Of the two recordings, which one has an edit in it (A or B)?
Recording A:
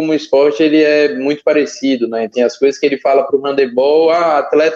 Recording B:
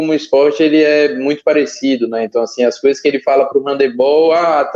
A